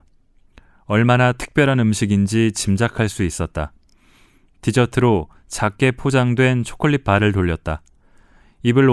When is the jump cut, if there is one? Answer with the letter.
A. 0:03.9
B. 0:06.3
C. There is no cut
C